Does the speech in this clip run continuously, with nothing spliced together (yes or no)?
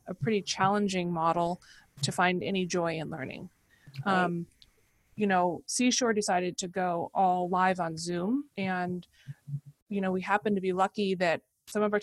no